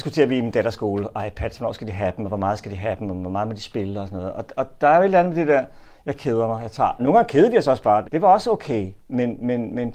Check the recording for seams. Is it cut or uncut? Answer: cut